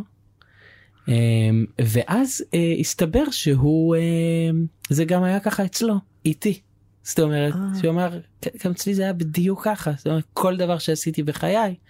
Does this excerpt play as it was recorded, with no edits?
yes; 0 cuts

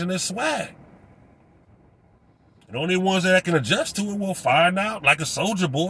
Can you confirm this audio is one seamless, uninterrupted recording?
yes; 0 cuts

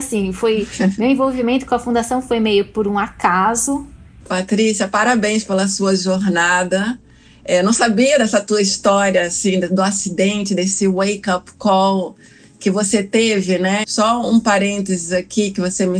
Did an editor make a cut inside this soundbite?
yes; 2 cuts; at 4.2 s, 13.8 s

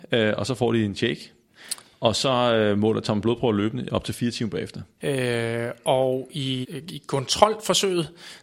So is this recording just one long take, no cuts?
no; 2 cuts; at 5.0 s, 6.6 s

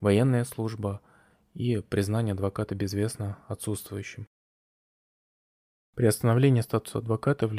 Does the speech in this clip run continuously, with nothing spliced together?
yes; 0 cuts

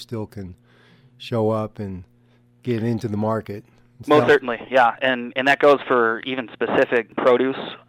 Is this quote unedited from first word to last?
yes; 0 cuts

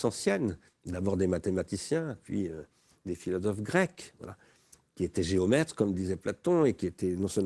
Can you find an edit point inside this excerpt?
no; 0 cuts

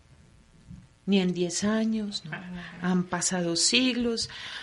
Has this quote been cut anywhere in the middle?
no; 0 cuts

